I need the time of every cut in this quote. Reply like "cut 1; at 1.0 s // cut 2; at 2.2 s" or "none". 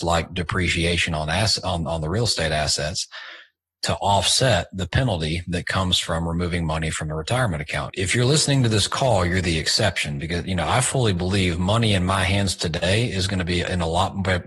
cut 1; at 7.9 s

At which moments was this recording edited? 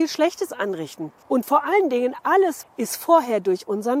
cut 1; at 1.2 s // cut 2; at 2.6 s

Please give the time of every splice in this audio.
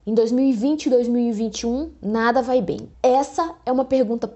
cut 1; at 2.9 s

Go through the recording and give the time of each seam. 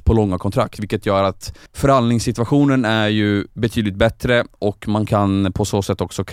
cut 1; at 1.7 s

